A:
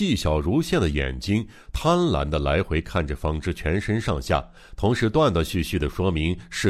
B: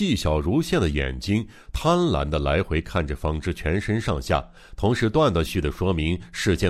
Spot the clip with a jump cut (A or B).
B